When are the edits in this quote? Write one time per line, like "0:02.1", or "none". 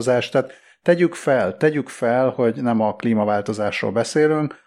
none